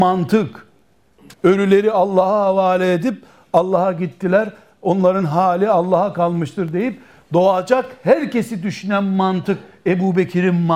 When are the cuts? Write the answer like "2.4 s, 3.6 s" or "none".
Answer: 1.3 s

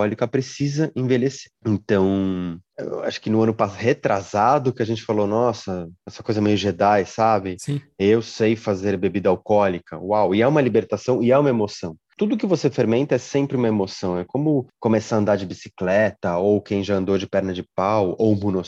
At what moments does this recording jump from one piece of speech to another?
none

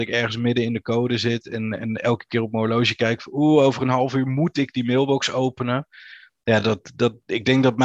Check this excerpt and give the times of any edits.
none

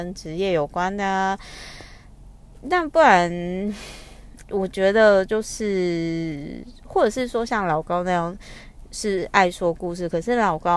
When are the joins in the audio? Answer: 4.4 s

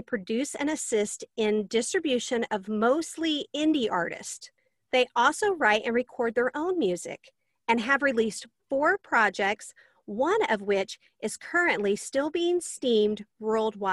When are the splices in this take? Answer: none

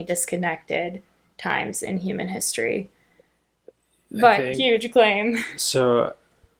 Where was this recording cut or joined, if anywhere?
4.5 s

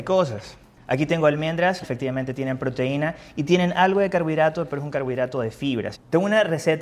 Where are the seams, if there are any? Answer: 1.8 s, 5.9 s

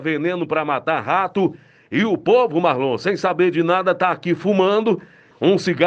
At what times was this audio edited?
none

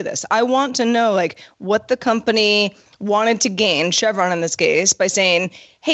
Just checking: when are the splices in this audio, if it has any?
none

